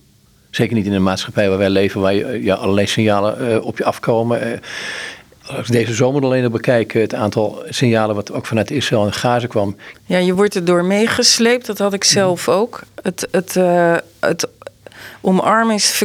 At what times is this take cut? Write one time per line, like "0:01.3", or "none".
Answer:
0:09.9